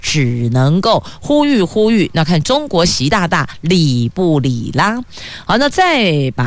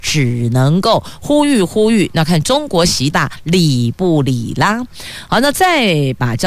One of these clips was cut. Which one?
second; 1 cut; at 3.1 s

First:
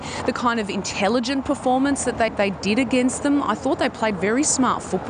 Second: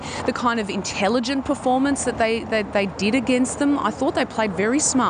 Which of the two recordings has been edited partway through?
first; 1 cut; at 2.3 s

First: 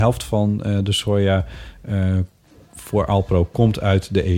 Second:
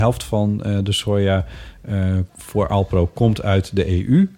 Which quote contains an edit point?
second; 1 cut; at 2.3 s

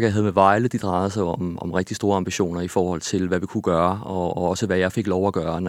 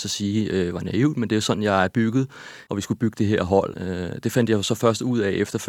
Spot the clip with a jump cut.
second; 2 cuts; at 2.7 s, 3.7 s

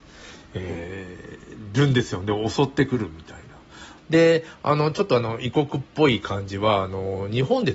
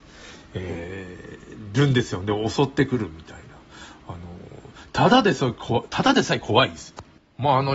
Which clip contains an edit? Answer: first; 1 cut; at 4.0 s

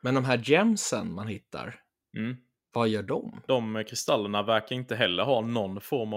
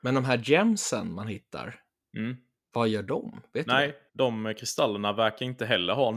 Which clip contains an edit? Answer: first; 1 cut; at 3.5 s

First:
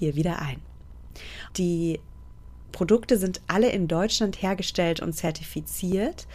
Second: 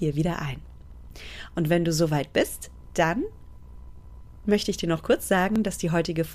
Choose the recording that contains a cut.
first; 1 cut; at 1.5 s

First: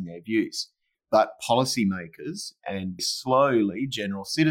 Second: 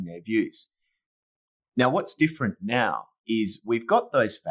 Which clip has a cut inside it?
first; 2 cuts; at 0.9 s, 3.0 s

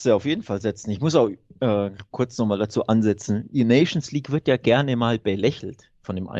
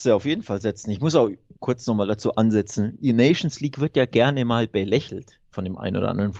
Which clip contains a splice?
second; 1 cut; at 1.6 s

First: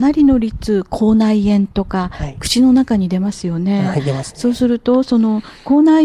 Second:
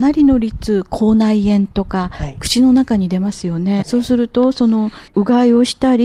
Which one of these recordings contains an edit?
second; 2 cuts; at 3.8 s, 5.1 s

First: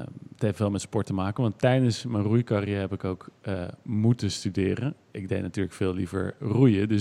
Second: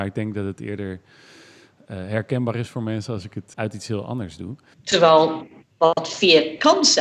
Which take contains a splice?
second; 2 cuts; at 3.5 s, 4.7 s

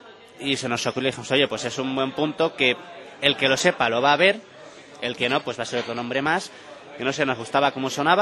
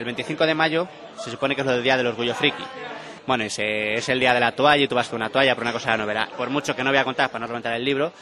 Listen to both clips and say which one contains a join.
second; 2 cuts; at 3.2 s, 6.3 s

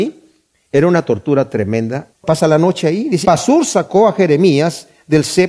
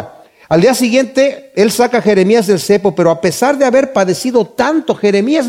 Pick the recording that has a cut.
first; 2 cuts; at 2.1 s, 3.2 s

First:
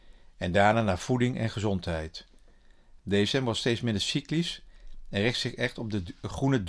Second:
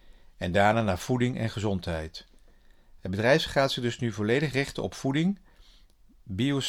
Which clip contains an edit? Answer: first; 1 cut; at 3.0 s

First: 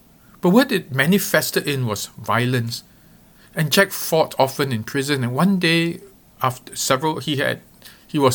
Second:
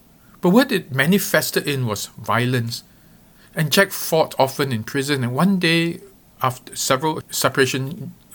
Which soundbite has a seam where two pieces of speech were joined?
second; 1 cut; at 7.2 s

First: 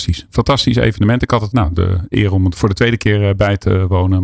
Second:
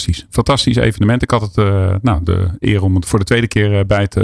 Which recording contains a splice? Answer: first; 1 cut; at 1.5 s

